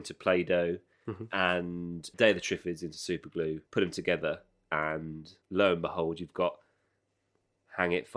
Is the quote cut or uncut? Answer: cut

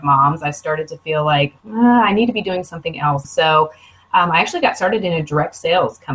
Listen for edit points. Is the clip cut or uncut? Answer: cut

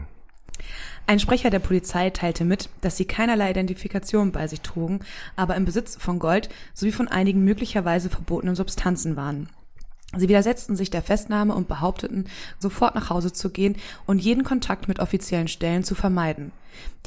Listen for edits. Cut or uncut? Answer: cut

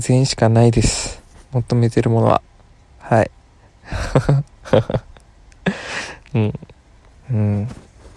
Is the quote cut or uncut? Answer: cut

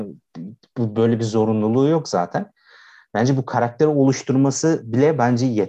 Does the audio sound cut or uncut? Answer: uncut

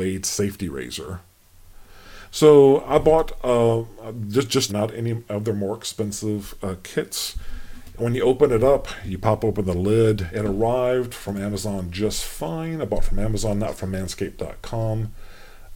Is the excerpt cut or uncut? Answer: cut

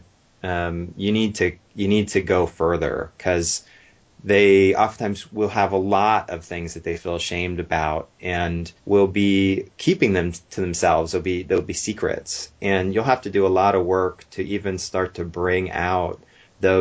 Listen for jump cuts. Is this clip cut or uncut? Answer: cut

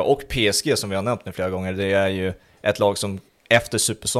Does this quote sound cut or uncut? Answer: uncut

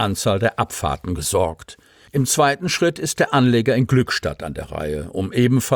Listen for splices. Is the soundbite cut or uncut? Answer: uncut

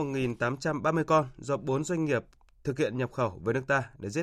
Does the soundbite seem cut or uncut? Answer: uncut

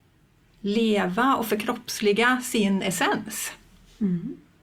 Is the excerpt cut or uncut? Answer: uncut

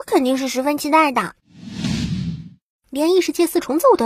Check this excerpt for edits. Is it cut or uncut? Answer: uncut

